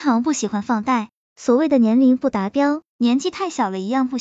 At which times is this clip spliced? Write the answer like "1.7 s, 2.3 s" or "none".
2.9 s

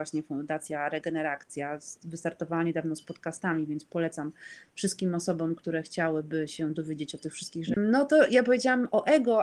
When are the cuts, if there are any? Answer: 7.7 s

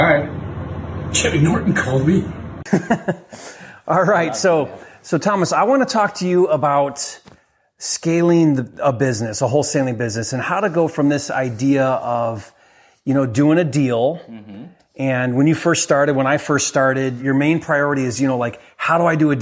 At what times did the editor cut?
17.2 s

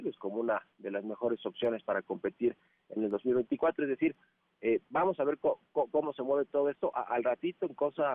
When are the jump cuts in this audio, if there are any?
none

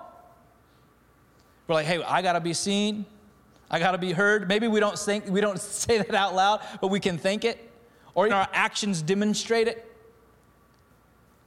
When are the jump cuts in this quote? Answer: 8.3 s

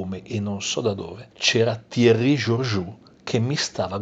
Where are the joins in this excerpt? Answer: 1.3 s

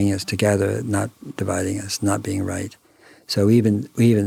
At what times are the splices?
none

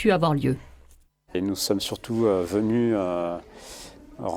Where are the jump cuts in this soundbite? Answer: 1.3 s

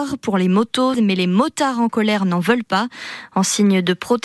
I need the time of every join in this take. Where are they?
0.9 s

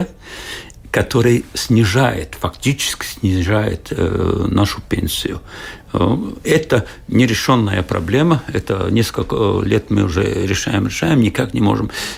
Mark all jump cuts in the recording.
none

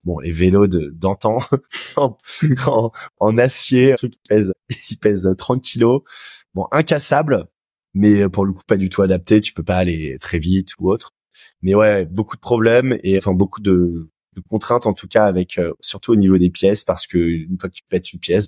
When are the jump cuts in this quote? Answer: none

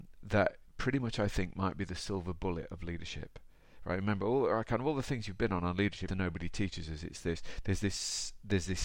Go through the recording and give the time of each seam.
6.1 s

